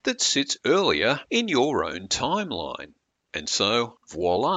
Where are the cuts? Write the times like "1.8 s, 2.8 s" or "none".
none